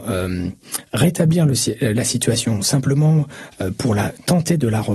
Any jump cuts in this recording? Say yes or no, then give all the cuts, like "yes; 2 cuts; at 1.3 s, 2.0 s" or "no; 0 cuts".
no; 0 cuts